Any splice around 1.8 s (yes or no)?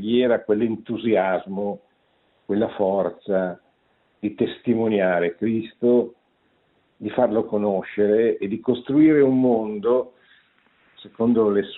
no